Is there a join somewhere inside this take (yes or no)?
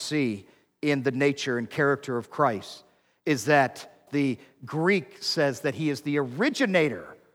yes